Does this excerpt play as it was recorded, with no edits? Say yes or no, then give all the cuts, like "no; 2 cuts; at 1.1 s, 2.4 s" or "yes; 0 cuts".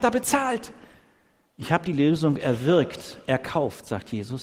no; 1 cut; at 1.5 s